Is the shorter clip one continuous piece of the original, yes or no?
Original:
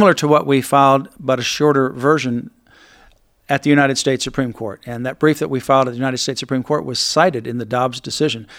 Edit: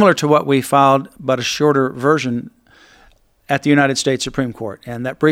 yes